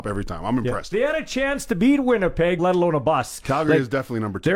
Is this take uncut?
no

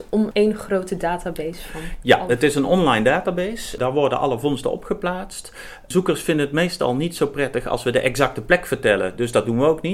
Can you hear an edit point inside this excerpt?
no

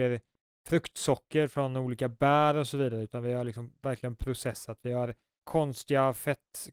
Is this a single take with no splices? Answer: no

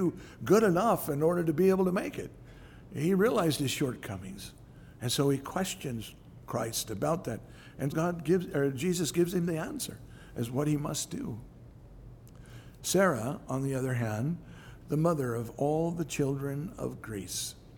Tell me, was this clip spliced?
yes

